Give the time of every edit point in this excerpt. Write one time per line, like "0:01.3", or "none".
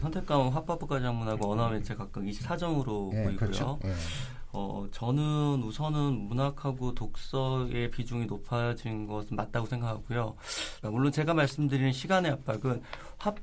0:10.8